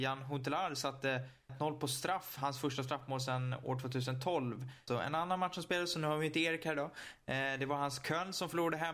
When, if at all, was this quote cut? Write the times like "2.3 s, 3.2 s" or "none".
1.5 s, 4.9 s